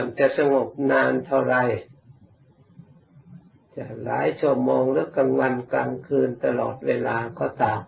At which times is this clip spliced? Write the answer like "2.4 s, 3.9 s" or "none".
none